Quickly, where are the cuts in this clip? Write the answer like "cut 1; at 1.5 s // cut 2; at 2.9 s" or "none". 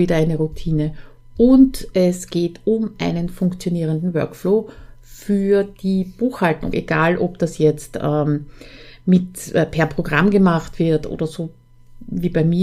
cut 1; at 6.7 s